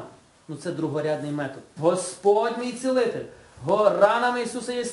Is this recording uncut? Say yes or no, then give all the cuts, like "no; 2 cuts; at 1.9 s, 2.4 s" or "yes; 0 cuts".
no; 1 cut; at 1.8 s